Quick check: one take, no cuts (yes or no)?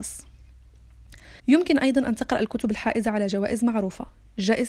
no